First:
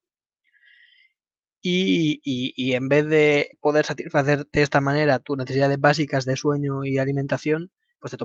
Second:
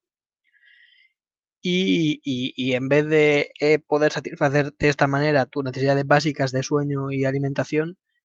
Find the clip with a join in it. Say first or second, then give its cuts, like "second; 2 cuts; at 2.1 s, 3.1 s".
first; 1 cut; at 3.5 s